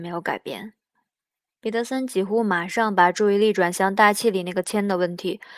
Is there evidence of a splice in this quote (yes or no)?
yes